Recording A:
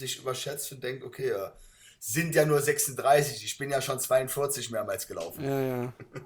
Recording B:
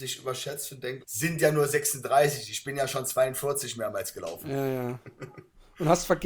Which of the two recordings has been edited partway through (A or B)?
B